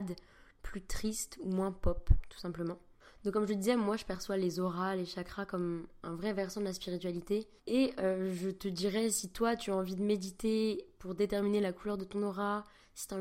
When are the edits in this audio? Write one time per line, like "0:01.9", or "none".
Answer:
0:07.6